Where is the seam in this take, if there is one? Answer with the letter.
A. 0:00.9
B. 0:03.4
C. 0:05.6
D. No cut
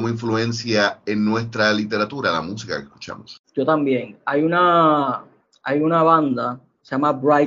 B